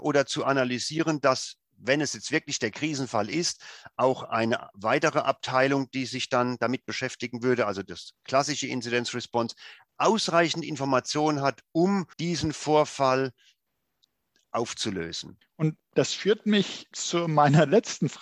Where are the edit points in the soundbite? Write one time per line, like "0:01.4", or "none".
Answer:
0:12.1
0:15.4
0:16.9